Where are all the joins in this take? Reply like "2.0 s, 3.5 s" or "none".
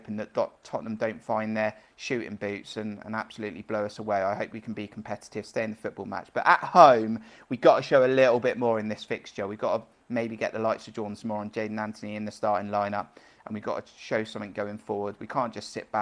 none

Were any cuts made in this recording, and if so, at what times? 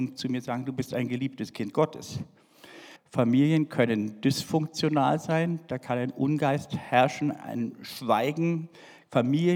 3.0 s

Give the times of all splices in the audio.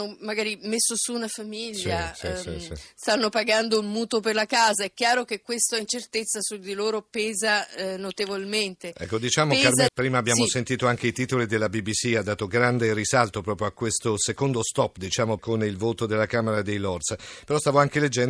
9.9 s, 15.4 s

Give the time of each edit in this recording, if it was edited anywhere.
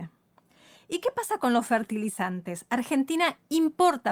none

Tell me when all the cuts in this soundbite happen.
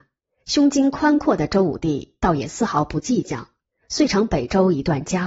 none

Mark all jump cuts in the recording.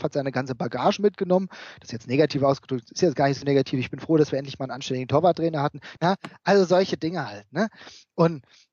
6.0 s

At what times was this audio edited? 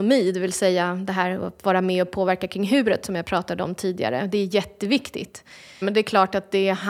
5.8 s

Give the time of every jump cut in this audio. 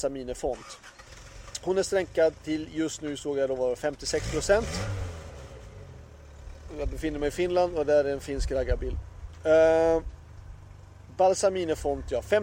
none

